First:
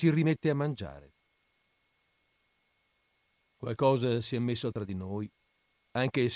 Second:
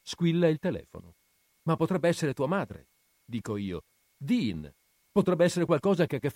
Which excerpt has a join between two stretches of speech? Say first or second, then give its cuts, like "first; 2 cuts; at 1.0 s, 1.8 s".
second; 1 cut; at 1.5 s